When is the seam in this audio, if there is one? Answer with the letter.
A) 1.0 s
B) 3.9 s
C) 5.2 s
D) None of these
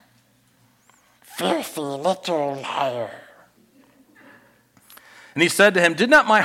D